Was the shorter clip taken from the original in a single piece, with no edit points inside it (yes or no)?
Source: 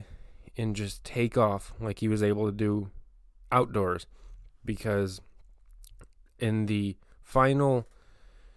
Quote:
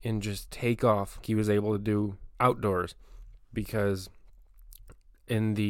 no